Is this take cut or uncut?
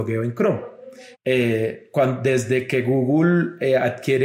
cut